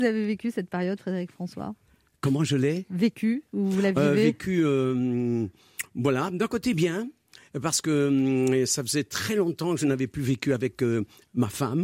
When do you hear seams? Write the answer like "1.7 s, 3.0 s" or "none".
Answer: none